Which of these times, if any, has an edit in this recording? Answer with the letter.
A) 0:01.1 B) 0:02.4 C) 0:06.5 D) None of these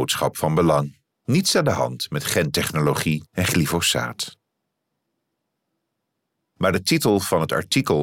C